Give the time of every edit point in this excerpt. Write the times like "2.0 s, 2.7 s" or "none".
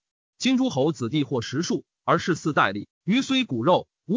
none